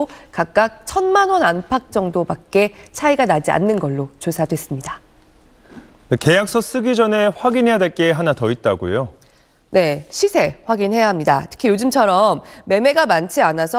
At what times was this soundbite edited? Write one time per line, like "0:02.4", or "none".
none